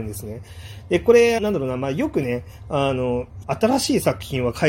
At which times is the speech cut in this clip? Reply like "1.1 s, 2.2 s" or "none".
1.4 s, 3.4 s